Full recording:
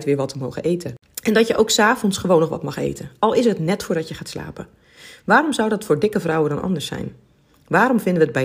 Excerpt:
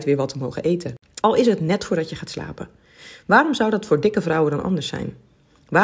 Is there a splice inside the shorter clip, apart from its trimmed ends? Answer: yes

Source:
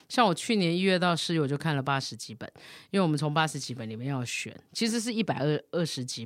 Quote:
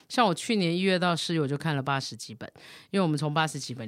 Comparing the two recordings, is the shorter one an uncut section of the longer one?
yes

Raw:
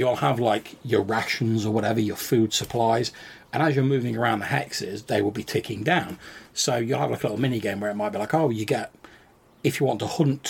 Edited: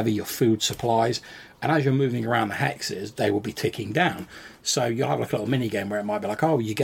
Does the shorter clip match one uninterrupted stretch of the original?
yes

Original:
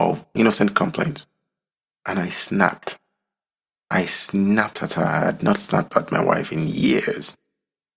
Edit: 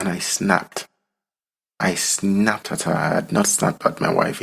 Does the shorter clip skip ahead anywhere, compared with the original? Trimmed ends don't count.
no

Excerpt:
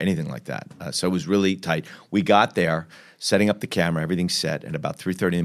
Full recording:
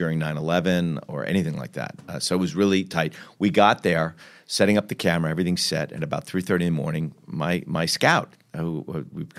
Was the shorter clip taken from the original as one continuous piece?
yes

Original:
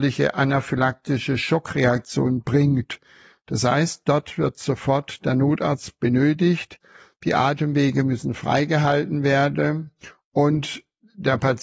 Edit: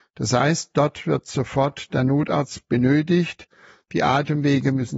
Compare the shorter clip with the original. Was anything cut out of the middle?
no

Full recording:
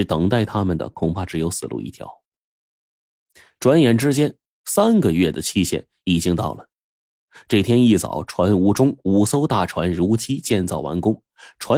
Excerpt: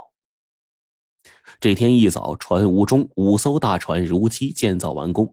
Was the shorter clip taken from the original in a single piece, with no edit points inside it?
no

